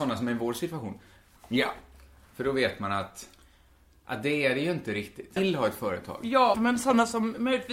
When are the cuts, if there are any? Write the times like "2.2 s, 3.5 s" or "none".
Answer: 1.4 s, 5.4 s, 6.5 s

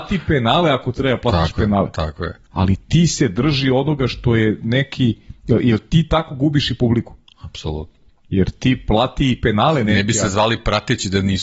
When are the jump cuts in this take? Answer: 8.1 s

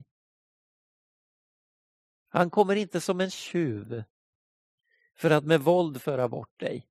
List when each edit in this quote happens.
2.1 s

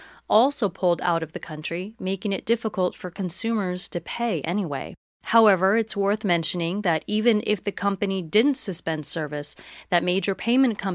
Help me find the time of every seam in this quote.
5.2 s

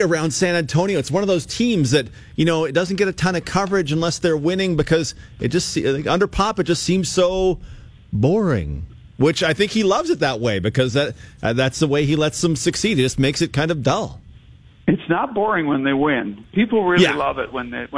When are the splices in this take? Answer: none

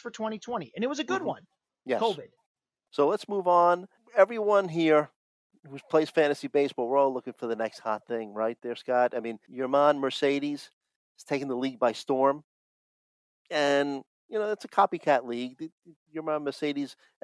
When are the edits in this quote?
2.9 s

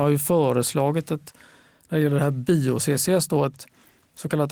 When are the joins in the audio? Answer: none

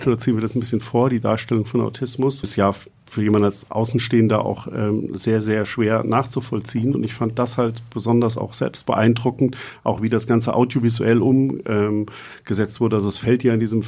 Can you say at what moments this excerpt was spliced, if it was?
2.4 s

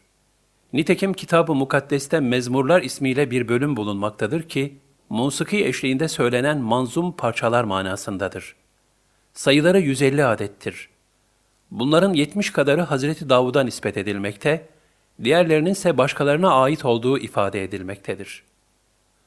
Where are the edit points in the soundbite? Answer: 5.0 s

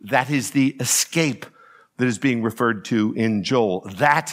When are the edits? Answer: none

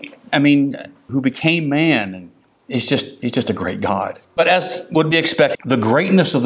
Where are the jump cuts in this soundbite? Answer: 1.1 s, 4.2 s, 5.5 s

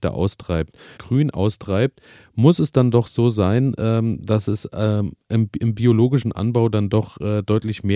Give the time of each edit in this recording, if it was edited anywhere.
1.0 s

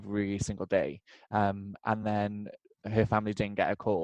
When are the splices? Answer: none

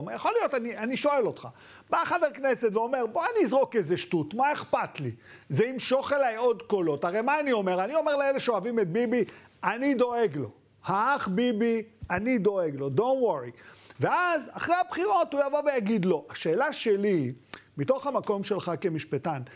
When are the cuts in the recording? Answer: none

